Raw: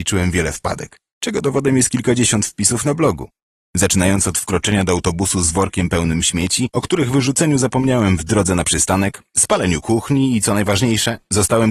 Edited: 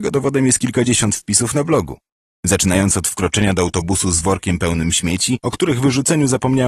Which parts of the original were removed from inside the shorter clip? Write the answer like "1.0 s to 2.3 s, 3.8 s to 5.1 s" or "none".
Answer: none